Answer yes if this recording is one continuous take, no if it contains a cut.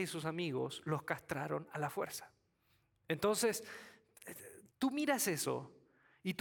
no